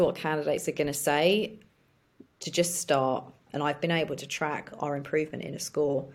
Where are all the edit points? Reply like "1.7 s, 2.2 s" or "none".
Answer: 3.5 s